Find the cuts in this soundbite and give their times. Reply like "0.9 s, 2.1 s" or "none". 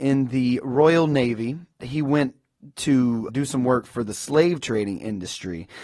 1.8 s, 3.3 s

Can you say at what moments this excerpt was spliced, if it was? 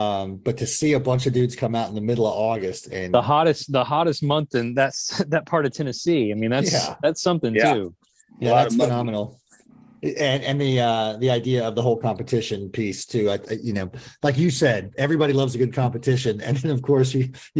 none

